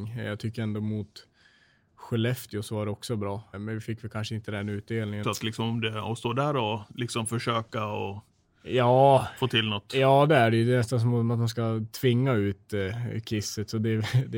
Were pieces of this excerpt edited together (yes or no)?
yes